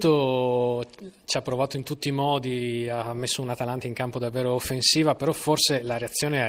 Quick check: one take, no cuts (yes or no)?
yes